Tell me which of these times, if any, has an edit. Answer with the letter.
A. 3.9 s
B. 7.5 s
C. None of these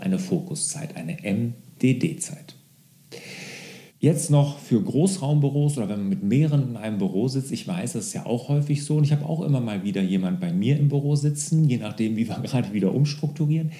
A